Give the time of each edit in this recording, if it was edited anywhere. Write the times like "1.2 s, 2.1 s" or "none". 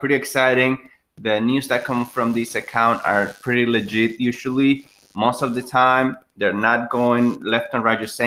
none